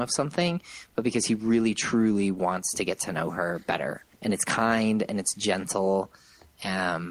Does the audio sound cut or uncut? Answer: cut